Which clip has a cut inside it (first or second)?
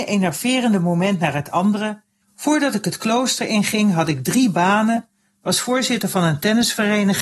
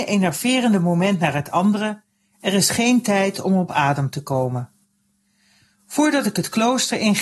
first